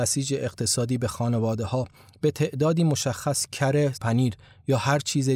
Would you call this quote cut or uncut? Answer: cut